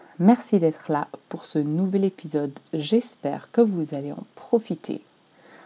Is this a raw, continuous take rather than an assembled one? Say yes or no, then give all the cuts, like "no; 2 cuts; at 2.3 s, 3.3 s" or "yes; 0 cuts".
yes; 0 cuts